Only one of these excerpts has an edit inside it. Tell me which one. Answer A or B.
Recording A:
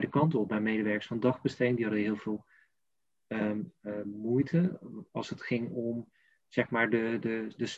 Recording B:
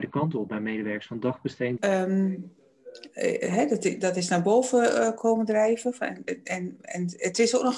B